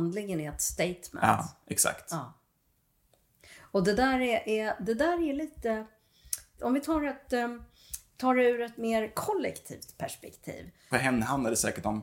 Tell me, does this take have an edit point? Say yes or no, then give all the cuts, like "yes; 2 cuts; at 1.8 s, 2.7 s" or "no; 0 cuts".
yes; 2 cuts; at 6.6 s, 10.9 s